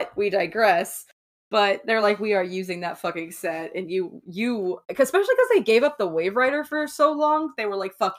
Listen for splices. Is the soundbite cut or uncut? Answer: uncut